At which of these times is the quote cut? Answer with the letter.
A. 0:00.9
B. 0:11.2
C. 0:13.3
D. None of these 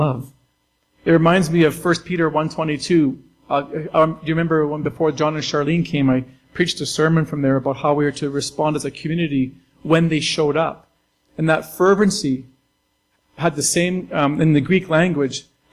B